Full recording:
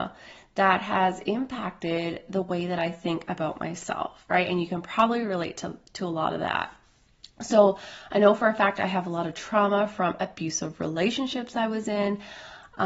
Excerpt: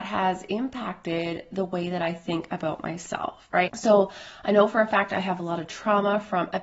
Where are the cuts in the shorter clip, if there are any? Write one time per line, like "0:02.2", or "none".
0:03.7